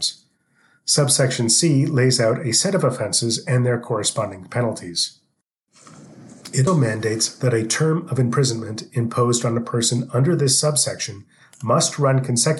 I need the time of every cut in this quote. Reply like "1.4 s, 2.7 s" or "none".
6.7 s